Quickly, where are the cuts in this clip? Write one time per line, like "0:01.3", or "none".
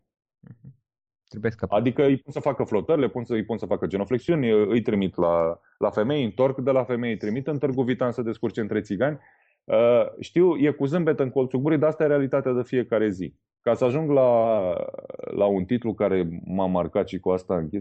none